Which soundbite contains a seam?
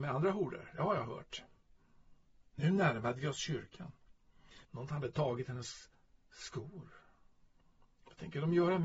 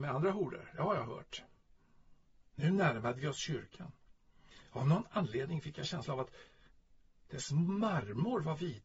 first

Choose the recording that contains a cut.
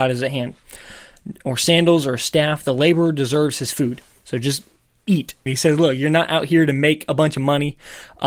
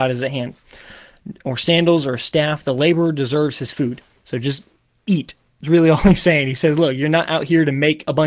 first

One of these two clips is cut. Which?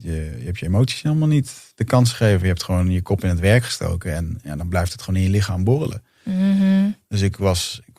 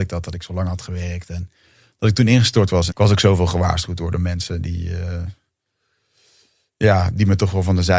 second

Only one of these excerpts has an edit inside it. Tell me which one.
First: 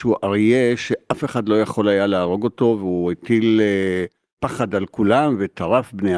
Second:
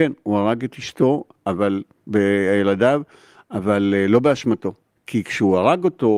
second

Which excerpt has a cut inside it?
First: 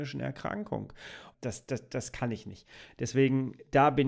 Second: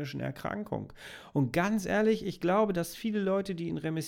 first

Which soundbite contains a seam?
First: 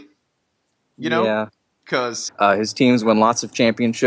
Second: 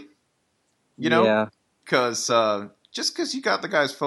first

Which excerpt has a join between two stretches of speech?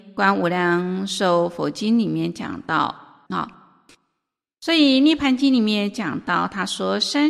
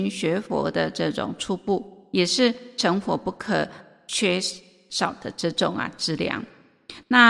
first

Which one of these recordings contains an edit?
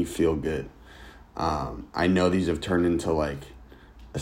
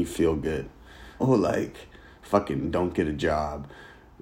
second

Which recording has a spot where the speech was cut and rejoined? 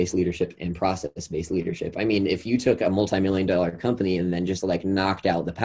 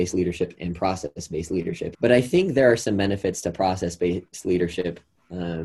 second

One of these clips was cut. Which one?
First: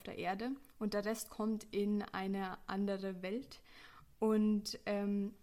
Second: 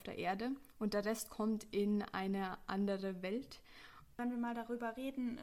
second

